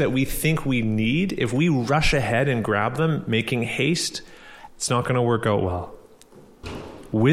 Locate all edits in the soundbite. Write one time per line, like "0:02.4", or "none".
0:04.7